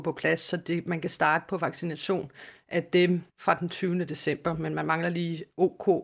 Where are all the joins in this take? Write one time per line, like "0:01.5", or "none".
0:03.3

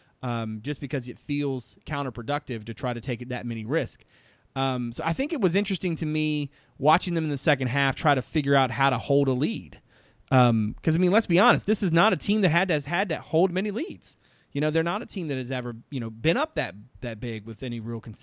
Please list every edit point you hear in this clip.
none

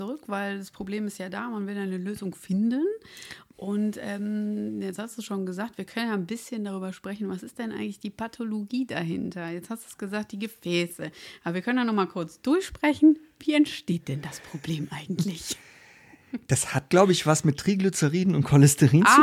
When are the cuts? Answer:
none

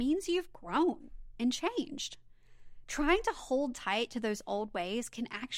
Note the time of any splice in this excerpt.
none

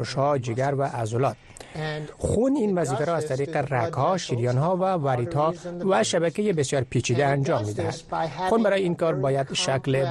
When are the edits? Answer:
none

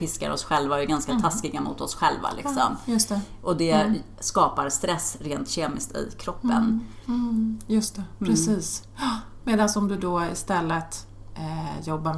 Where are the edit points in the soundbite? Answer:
none

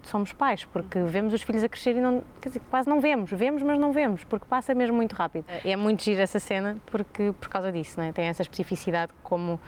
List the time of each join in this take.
none

